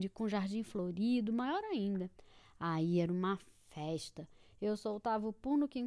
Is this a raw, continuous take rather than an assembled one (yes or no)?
yes